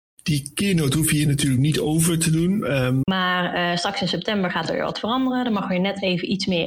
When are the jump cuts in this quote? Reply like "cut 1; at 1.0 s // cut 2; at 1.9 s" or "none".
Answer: cut 1; at 3.0 s